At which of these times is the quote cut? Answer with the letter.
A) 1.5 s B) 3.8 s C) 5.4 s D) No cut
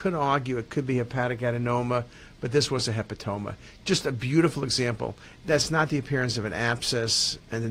C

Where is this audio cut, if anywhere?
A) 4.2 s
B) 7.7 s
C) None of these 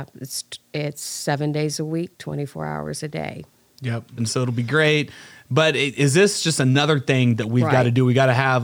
A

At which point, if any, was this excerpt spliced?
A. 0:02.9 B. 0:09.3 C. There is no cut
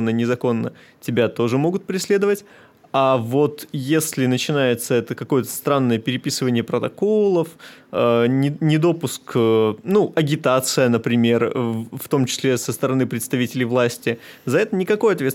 C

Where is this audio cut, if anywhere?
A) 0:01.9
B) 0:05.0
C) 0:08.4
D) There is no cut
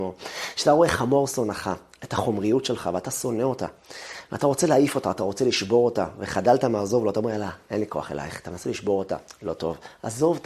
D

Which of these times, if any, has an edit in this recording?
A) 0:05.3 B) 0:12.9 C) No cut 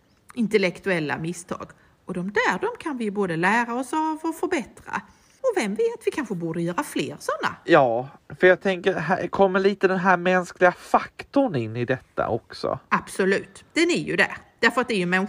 C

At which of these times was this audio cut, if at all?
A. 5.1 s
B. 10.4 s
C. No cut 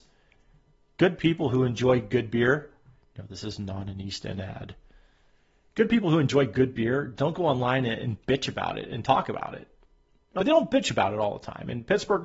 B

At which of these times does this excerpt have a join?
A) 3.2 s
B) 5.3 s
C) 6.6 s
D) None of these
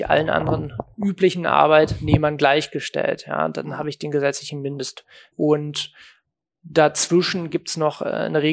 B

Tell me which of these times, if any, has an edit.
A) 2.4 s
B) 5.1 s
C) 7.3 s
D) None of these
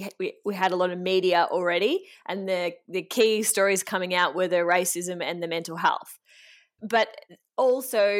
D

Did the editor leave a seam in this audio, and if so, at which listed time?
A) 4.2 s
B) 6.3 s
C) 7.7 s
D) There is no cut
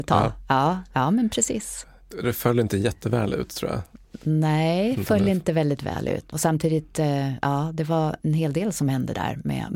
B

